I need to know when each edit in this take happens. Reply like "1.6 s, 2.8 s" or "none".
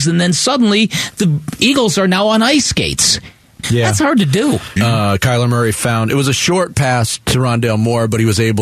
3.6 s, 4.8 s